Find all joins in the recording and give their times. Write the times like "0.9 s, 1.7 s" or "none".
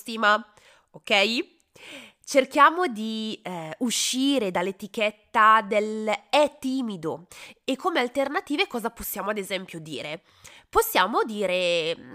none